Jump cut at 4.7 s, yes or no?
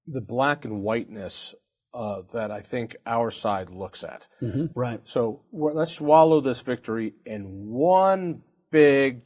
yes